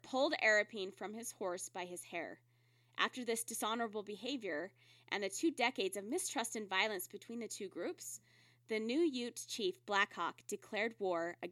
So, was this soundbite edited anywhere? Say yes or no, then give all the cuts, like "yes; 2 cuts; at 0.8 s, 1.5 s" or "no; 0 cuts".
no; 0 cuts